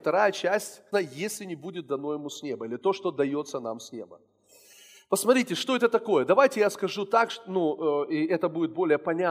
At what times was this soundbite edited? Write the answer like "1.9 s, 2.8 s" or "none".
0.9 s